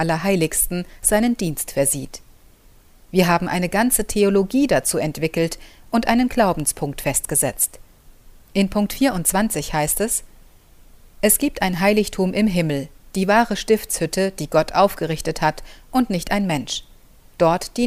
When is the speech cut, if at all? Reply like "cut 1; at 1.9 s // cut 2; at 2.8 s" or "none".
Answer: none